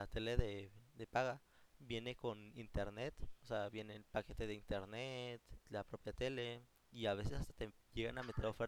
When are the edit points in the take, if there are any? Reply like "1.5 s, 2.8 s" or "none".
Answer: 5.6 s, 6.8 s